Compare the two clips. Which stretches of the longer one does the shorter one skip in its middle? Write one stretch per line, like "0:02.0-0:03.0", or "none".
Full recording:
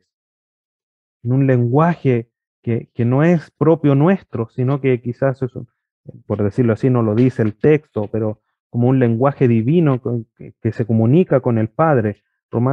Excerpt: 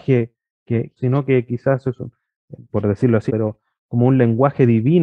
0:02.9-0:04.5
0:06.8-0:08.1